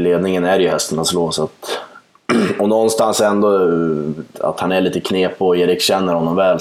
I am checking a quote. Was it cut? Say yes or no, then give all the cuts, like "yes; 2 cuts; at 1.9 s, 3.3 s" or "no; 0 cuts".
yes; 1 cut; at 4.3 s